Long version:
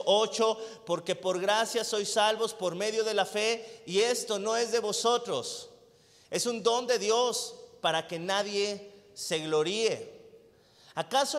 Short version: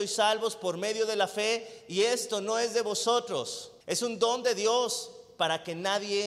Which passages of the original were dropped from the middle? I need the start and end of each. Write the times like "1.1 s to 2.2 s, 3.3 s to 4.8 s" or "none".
5.8 s to 6.2 s